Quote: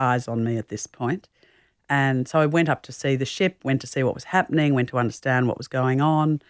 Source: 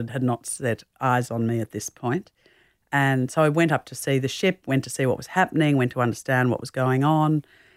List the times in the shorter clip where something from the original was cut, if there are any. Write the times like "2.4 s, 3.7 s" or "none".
none